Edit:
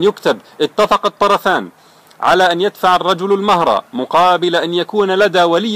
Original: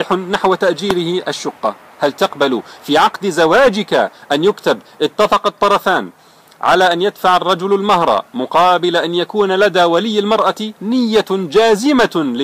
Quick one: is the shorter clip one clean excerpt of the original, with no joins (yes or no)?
yes